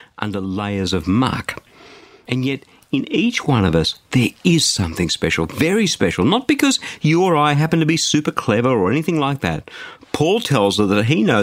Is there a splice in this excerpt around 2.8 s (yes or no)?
no